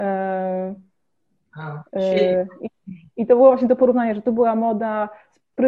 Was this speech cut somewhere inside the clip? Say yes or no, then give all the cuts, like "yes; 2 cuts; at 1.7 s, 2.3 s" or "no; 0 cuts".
no; 0 cuts